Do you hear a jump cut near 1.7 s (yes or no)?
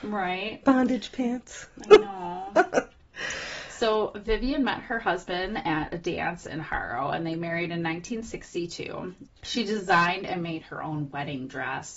no